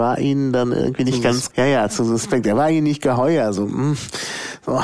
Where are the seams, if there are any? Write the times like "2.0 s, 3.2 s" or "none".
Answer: 1.5 s